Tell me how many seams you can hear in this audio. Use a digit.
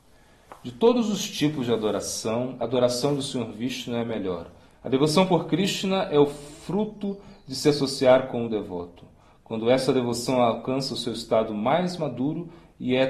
1